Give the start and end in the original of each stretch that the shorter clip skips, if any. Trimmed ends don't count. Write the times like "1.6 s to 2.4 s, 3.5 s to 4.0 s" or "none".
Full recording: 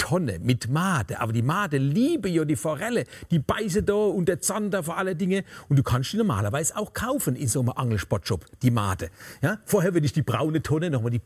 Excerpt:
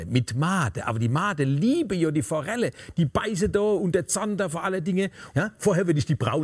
5.6 s to 9.4 s